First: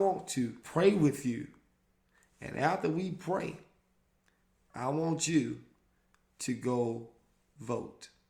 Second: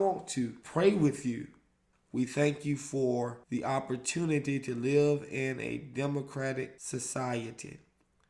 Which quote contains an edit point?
second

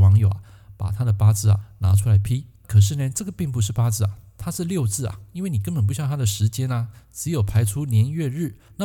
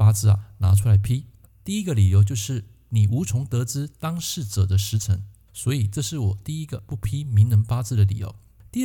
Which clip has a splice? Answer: second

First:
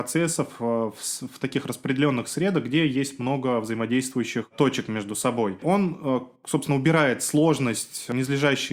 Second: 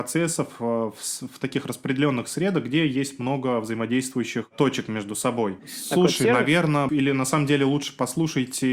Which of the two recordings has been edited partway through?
second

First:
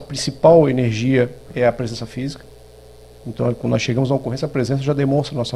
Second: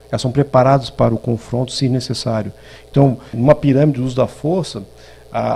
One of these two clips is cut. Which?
second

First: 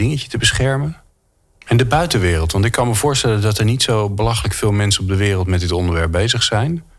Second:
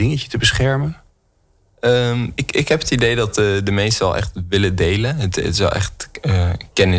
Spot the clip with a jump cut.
first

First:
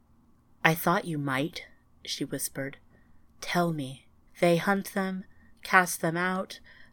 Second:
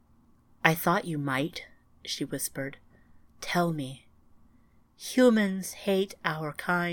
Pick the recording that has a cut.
first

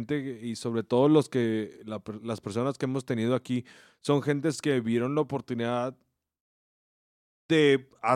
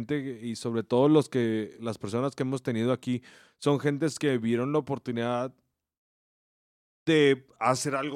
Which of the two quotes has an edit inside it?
second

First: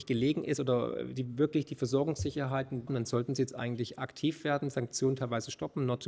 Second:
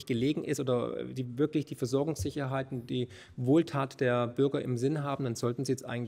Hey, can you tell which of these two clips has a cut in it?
first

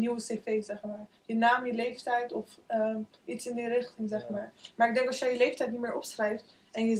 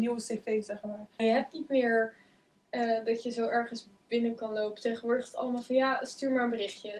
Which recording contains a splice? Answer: second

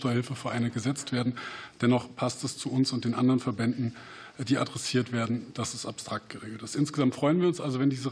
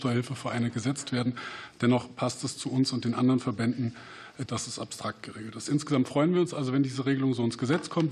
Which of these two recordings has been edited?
second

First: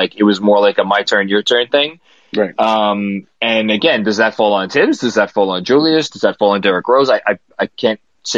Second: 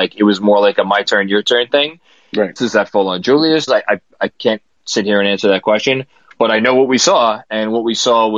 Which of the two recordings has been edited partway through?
second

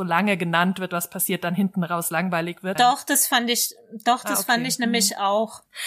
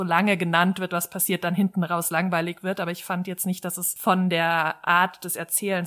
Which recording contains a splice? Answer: first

